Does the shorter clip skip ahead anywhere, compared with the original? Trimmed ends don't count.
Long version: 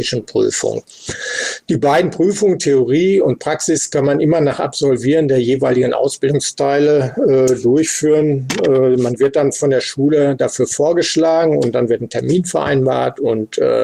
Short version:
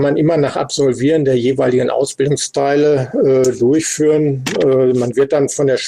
no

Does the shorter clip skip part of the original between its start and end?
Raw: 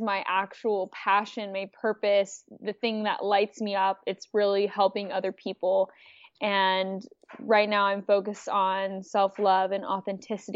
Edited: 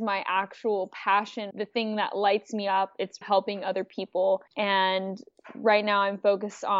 yes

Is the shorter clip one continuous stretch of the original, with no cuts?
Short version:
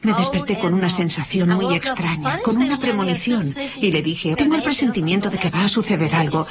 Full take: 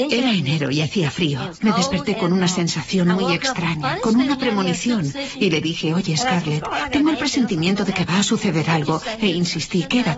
no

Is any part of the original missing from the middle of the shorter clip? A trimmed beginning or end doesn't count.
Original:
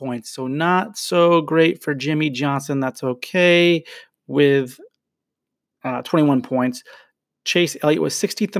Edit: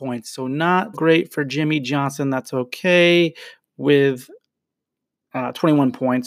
yes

